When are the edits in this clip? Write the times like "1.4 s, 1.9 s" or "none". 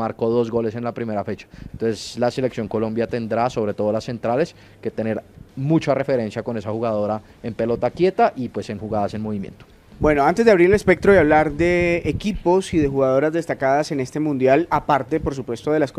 1.7 s